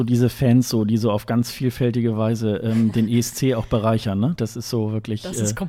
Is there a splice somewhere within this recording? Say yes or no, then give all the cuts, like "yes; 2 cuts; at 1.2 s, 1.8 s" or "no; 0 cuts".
no; 0 cuts